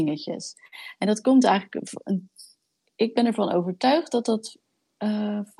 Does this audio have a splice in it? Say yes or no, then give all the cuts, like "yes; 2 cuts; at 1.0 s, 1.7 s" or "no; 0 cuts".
no; 0 cuts